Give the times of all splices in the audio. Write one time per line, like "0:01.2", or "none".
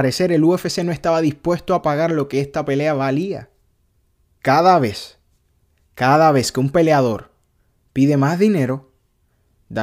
0:04.4